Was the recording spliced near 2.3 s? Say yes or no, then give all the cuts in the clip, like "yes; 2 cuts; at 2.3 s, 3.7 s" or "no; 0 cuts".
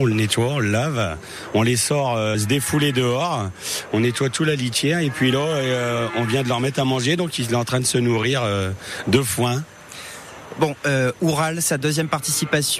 no; 0 cuts